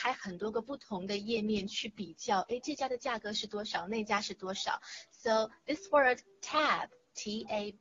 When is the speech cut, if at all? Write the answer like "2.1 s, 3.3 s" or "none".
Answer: none